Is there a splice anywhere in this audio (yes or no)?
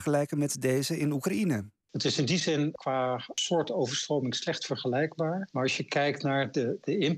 no